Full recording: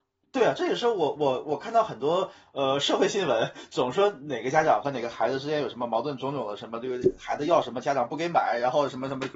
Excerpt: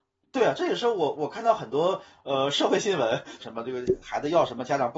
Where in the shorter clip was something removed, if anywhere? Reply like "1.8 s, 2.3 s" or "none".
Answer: 1.2 s, 3.4 s